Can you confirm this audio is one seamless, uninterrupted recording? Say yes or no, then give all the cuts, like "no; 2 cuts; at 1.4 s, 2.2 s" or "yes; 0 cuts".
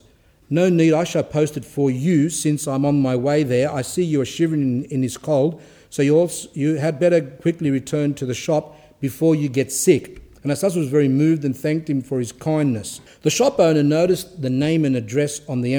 no; 1 cut; at 13.1 s